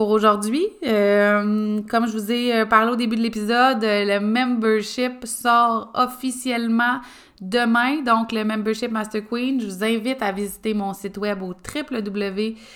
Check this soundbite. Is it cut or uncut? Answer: uncut